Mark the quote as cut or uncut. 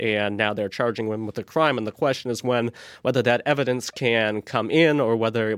uncut